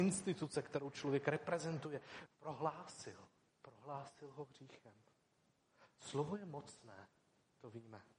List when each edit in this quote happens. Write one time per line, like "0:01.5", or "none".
0:02.3
0:03.5